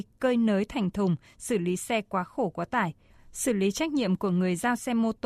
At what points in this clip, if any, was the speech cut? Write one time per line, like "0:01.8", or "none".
none